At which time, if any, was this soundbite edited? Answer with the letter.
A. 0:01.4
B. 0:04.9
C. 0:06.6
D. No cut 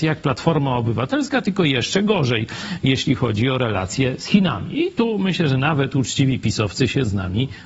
D